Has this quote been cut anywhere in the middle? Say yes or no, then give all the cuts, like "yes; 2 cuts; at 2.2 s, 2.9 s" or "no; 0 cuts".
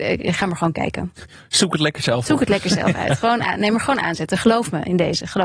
no; 0 cuts